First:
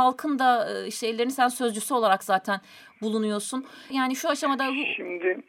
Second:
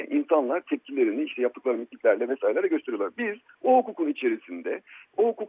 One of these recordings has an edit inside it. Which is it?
first; 1 cut; at 3.9 s

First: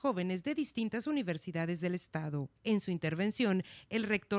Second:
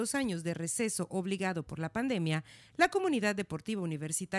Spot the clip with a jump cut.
first; 1 cut; at 2.6 s

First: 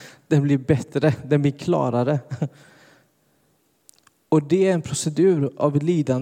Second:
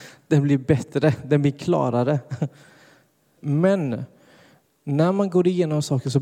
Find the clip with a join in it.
second; 1 cut; at 3.4 s

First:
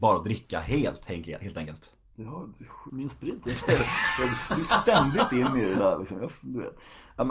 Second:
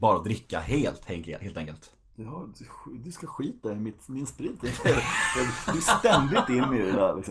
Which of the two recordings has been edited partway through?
first; 1 cut; at 2.9 s

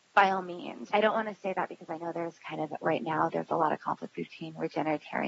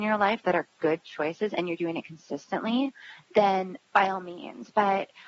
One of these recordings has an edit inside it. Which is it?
first; 1 cut; at 0.9 s

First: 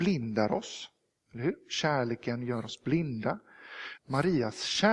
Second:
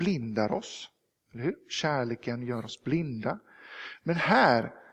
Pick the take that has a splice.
first; 1 cut; at 4.0 s

